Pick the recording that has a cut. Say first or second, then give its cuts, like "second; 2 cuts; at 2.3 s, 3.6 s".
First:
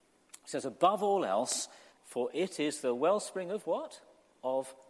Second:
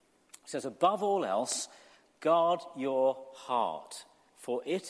first; 1 cut; at 1.9 s